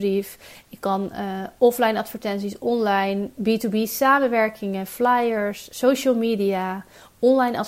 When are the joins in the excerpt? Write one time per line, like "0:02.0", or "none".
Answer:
none

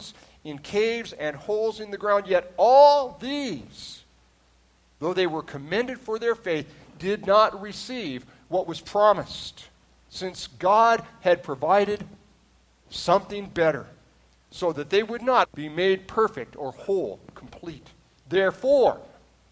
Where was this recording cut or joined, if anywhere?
0:15.4

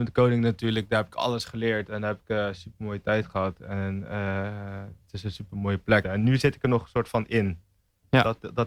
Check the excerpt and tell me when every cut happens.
0:06.0

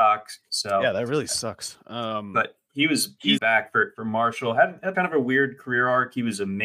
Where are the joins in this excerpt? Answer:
0:03.4
0:04.9

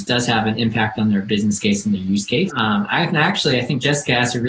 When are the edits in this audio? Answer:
0:02.5

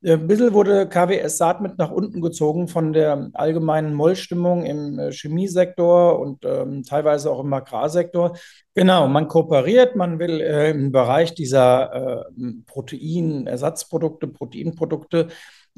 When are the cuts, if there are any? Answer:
0:08.6

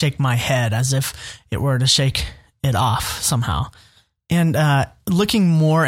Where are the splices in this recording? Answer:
none

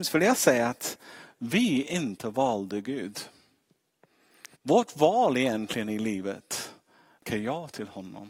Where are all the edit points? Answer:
0:04.5

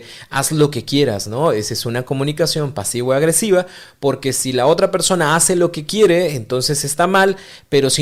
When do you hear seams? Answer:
none

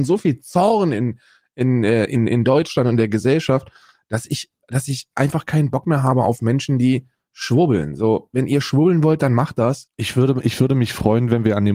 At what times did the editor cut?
0:09.9

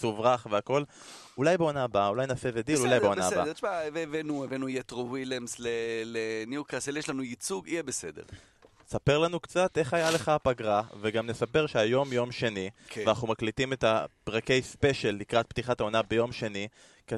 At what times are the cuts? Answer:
none

